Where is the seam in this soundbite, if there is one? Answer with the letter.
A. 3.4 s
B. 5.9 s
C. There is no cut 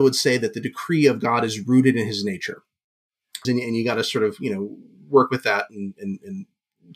A